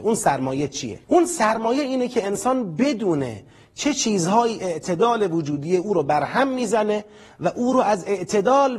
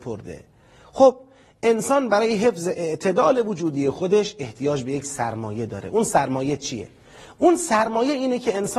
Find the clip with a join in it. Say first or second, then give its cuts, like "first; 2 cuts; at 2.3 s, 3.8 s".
first; 1 cut; at 1.0 s